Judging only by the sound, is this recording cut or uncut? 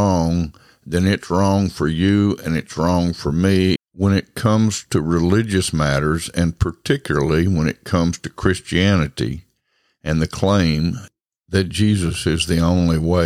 cut